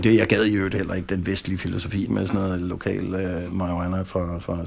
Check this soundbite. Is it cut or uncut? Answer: cut